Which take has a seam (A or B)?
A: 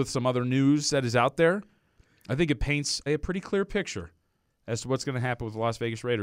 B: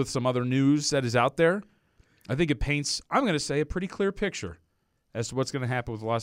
A